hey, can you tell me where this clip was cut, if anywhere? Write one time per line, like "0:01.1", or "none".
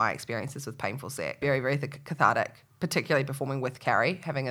0:01.4